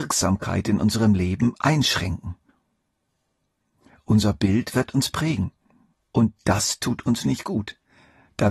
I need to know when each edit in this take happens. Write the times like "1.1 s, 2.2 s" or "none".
5.9 s

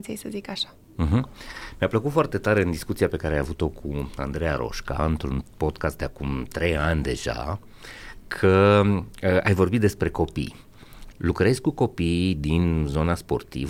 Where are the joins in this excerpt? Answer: 11.1 s

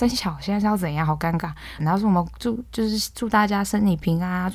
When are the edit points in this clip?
1.8 s

